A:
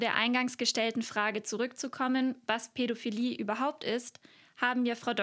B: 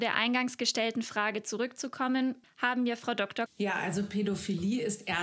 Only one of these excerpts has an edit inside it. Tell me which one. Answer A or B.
B